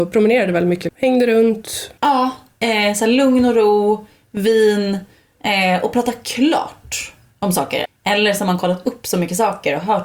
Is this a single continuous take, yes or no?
no